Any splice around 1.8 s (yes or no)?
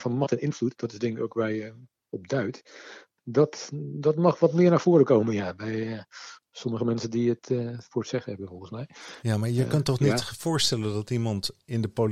no